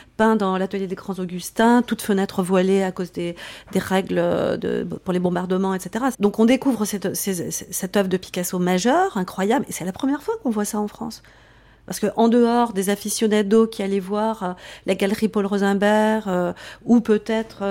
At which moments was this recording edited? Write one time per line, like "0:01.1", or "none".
0:06.1